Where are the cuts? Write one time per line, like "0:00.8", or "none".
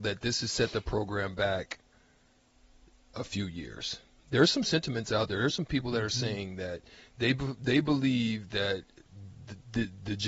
none

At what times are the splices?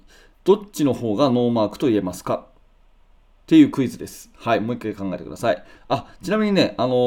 0:05.8

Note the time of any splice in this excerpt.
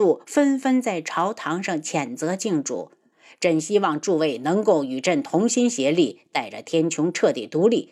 0:03.1

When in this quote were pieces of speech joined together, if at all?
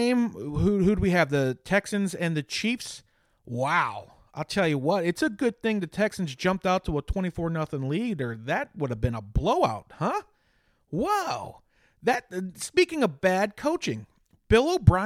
none

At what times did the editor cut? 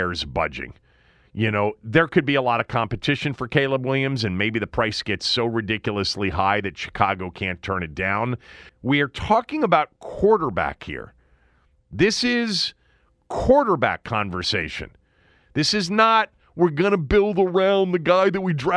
0:08.7

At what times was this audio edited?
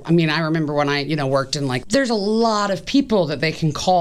0:01.8

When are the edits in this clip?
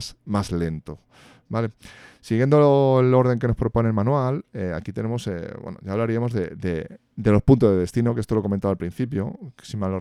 none

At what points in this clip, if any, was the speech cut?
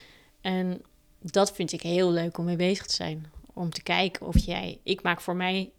none

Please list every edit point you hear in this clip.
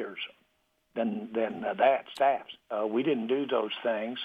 0:02.6

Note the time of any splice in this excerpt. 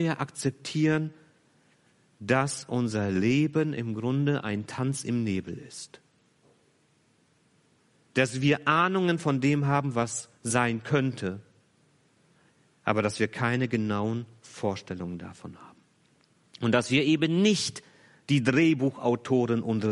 none

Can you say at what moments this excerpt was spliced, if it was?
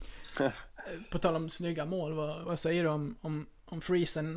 0:02.4

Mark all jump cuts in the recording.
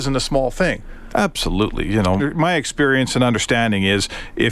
0:01.1
0:02.2

